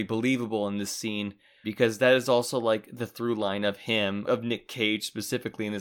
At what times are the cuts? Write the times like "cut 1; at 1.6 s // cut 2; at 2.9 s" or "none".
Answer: cut 1; at 1.6 s // cut 2; at 4.2 s

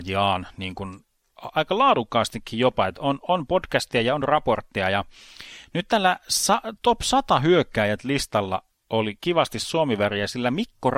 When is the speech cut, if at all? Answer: cut 1; at 1.5 s

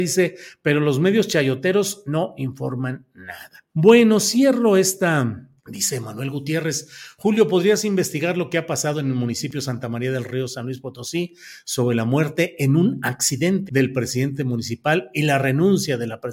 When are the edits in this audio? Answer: cut 1; at 3.7 s // cut 2; at 5.6 s // cut 3; at 13.7 s

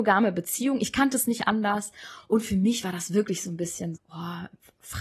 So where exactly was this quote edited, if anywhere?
cut 1; at 4.0 s

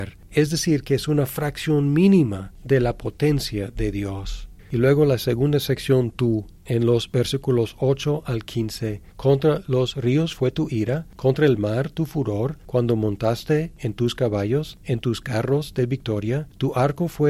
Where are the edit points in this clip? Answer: cut 1; at 9.1 s

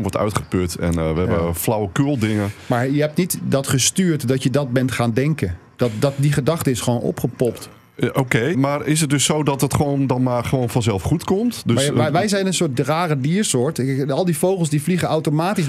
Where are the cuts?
cut 1; at 8.5 s

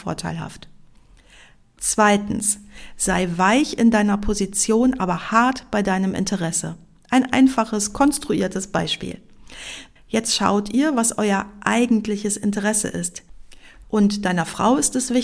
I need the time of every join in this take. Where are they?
cut 1; at 10.0 s // cut 2; at 13.8 s

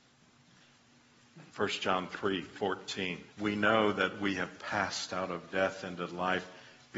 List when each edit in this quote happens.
cut 1; at 1.5 s // cut 2; at 3.3 s

